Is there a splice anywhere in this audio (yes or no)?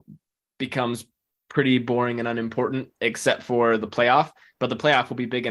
no